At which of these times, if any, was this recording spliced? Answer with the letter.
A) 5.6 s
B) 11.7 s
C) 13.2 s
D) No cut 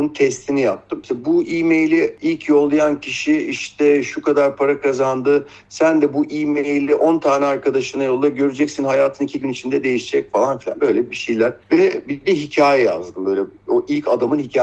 D